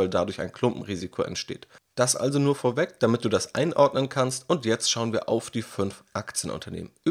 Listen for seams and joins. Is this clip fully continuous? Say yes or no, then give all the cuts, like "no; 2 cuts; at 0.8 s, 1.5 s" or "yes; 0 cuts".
yes; 0 cuts